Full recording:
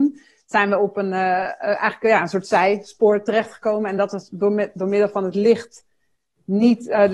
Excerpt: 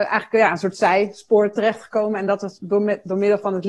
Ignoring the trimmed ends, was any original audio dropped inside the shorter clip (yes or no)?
no